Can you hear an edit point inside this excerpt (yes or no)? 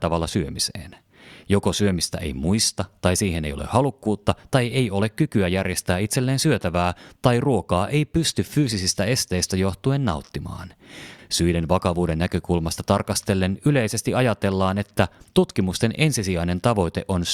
yes